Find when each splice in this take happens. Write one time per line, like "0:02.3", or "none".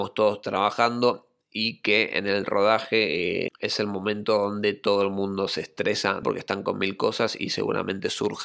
0:03.5
0:06.2